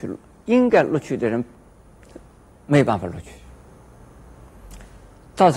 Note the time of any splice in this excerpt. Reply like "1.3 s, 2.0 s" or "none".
none